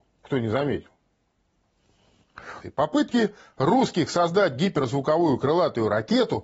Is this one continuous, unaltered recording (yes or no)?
no